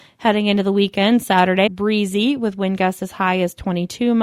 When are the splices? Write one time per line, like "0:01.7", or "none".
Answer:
0:01.7